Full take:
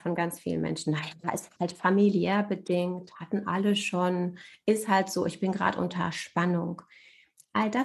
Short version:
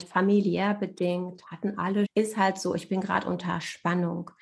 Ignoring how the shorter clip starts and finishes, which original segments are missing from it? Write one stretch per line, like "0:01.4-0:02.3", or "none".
0:03.7-0:04.6